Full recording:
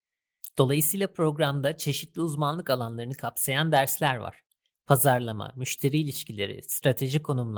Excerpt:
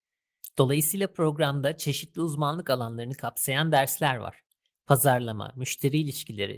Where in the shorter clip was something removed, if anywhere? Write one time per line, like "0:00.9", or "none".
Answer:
none

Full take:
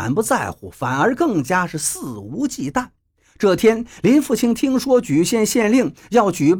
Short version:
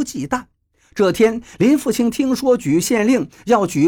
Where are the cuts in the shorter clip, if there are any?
0:02.8

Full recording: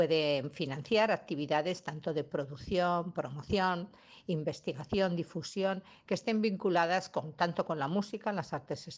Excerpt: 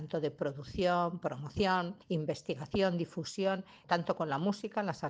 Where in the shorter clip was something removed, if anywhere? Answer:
0:02.0
0:03.8

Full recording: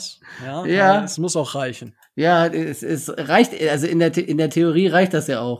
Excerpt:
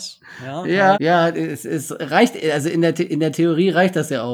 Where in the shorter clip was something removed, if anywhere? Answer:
0:00.9

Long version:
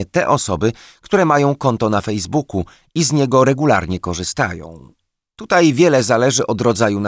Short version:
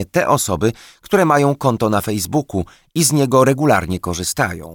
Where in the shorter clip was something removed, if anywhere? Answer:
none

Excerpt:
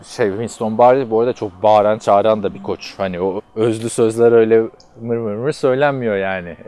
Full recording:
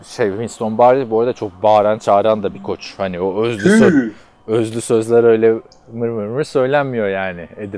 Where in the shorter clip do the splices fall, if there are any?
0:03.4

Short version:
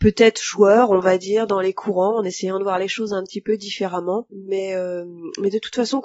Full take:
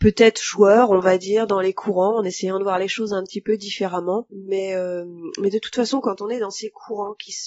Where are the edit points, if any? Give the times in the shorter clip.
none

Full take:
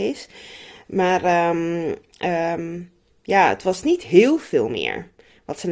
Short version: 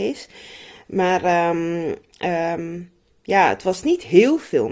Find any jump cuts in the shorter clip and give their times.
none

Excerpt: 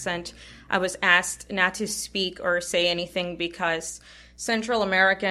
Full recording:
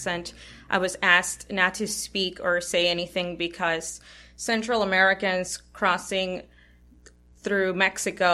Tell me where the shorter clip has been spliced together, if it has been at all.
none

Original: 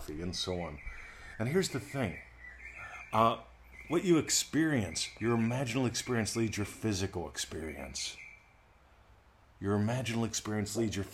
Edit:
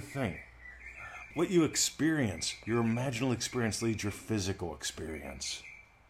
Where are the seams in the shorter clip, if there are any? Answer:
0:01.3

